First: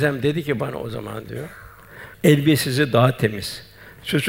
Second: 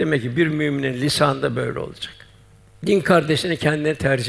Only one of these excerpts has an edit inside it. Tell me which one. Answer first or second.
first